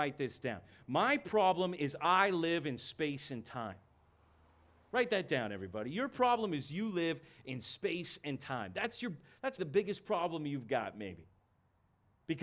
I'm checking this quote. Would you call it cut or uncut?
cut